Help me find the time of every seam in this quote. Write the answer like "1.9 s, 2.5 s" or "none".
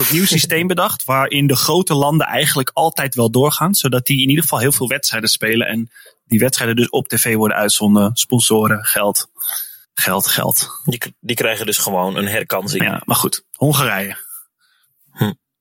9.8 s